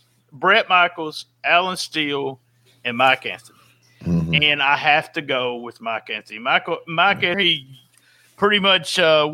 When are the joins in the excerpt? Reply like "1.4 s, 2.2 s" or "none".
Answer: 7.3 s